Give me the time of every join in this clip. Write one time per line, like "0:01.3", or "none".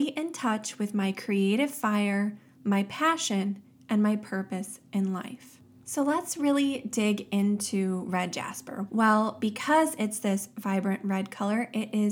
0:08.9